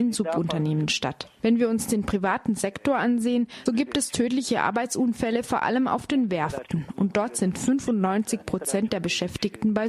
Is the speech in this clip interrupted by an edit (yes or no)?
yes